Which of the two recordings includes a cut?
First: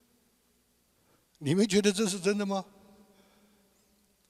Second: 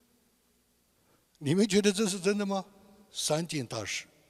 second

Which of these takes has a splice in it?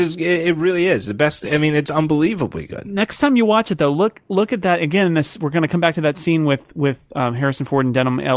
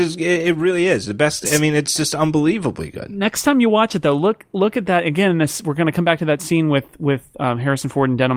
first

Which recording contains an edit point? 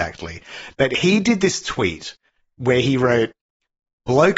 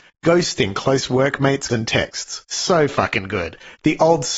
second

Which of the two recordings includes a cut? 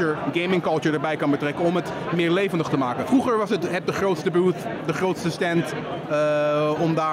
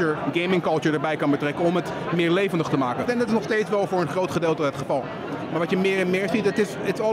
second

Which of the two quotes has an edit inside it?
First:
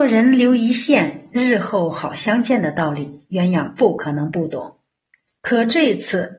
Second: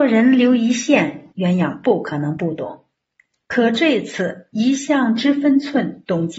second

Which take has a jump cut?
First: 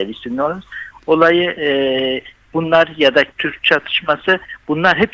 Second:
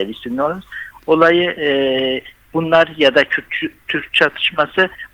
first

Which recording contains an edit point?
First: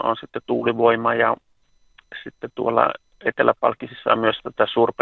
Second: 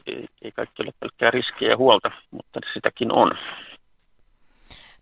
second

